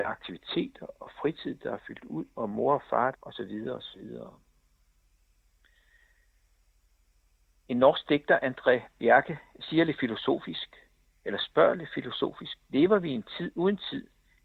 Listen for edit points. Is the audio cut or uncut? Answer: cut